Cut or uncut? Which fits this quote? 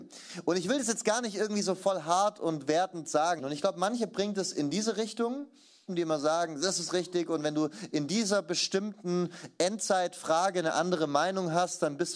cut